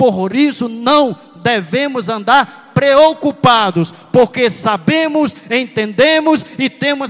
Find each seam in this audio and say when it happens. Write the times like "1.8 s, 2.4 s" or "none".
none